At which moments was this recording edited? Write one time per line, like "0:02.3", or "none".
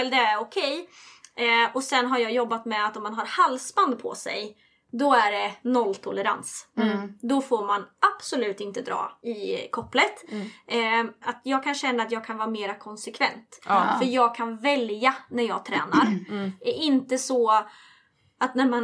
0:09.2
0:11.2